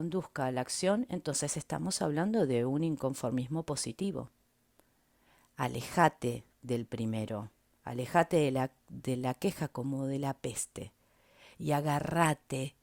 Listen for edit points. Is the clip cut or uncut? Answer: uncut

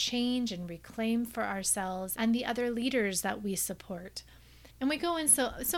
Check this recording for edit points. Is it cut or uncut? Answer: cut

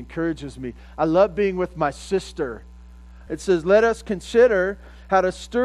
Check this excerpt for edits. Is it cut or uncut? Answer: cut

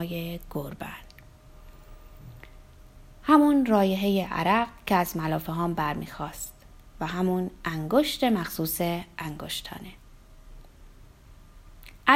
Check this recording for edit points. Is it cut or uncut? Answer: uncut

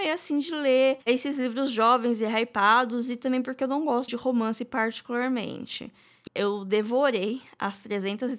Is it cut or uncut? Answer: cut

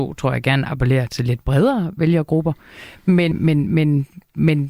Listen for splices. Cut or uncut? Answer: cut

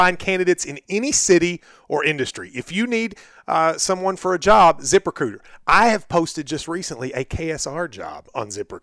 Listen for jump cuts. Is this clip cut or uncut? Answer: uncut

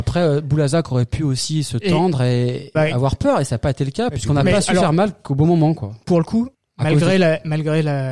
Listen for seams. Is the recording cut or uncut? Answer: cut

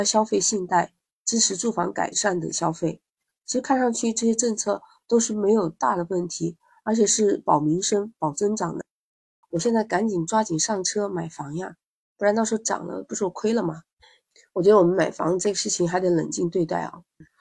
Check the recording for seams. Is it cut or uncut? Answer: cut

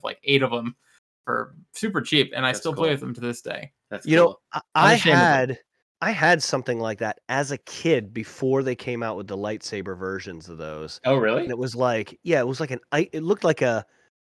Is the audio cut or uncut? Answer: uncut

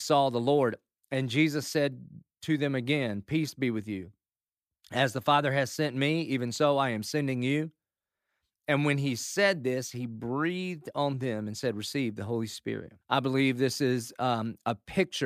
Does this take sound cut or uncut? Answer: cut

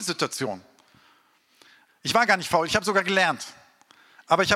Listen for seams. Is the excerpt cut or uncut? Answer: cut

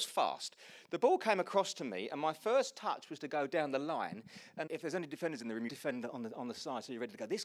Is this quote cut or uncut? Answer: cut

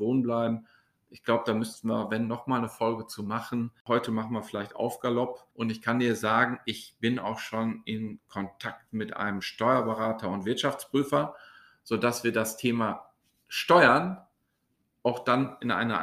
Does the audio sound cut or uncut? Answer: cut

